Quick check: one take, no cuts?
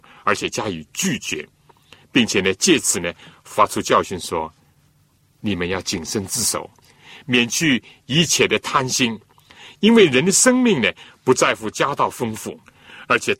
yes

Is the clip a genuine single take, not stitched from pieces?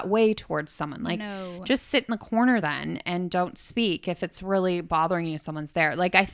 yes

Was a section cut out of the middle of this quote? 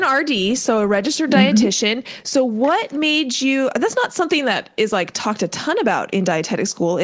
no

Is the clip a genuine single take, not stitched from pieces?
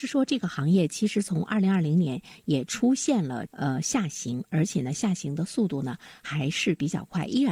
yes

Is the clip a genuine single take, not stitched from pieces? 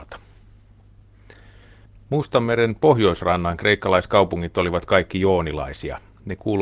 yes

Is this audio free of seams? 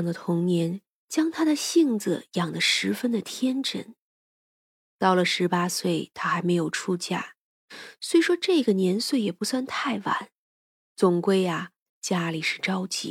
yes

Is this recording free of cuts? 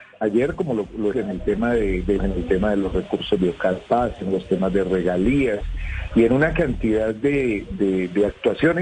no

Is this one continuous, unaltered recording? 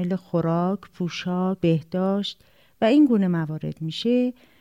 no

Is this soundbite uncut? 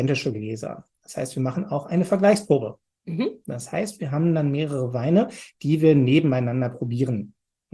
yes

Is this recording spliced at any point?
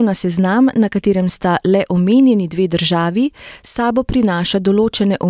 no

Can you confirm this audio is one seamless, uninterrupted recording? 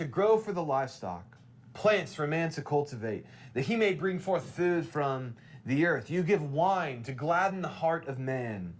yes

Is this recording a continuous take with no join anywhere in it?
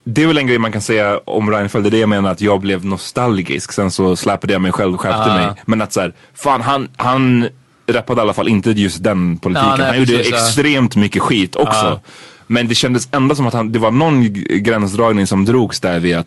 no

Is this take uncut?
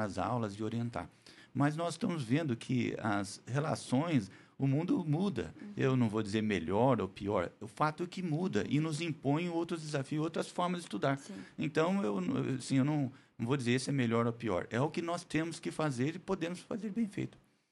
yes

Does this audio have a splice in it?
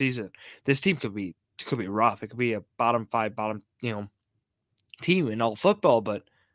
no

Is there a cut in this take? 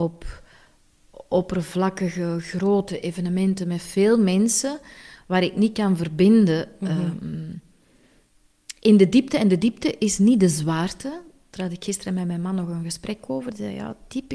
no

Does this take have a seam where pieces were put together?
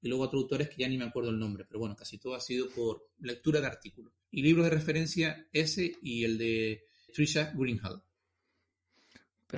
yes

